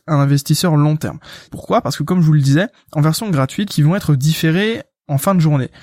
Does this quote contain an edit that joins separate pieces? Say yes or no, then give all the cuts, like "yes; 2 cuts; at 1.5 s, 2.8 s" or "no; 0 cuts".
yes; 2 cuts; at 1.5 s, 3.7 s